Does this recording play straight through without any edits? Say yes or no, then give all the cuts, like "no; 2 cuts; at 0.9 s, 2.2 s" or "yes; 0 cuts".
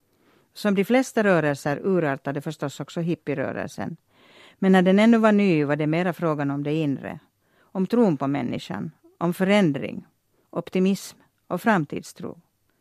yes; 0 cuts